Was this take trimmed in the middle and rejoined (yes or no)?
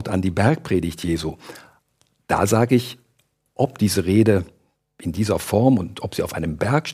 no